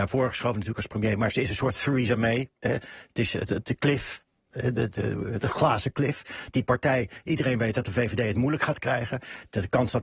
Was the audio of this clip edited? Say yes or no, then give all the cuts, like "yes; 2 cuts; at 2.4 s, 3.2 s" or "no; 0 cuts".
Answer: yes; 1 cut; at 4.9 s